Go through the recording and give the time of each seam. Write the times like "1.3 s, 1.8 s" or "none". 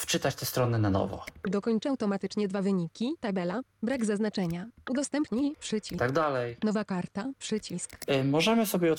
6.0 s